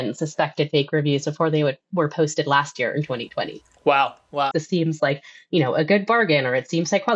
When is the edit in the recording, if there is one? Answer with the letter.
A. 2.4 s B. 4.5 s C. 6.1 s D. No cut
B